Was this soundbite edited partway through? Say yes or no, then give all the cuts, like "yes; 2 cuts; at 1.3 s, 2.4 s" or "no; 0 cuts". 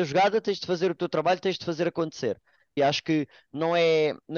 yes; 1 cut; at 2.8 s